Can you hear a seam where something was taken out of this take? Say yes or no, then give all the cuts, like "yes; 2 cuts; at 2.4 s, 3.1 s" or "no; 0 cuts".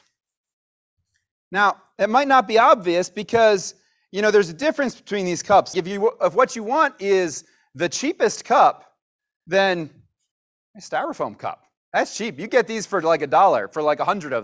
yes; 1 cut; at 5.7 s